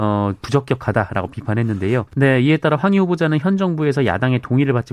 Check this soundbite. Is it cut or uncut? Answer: cut